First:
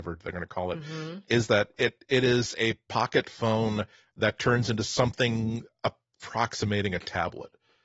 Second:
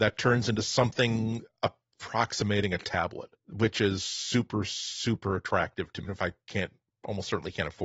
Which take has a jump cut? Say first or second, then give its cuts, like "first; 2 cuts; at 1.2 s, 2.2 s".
second; 2 cuts; at 3.4 s, 6.1 s